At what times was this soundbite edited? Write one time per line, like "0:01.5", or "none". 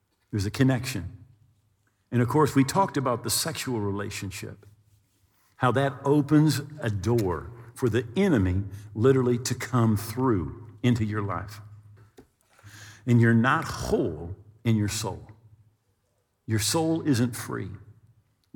none